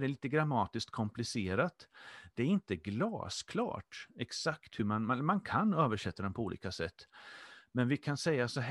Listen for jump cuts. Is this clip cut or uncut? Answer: uncut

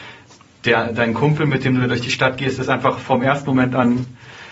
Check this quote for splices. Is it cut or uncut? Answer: uncut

